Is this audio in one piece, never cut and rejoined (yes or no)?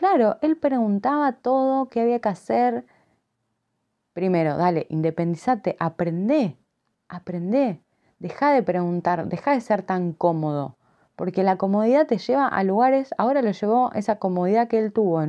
yes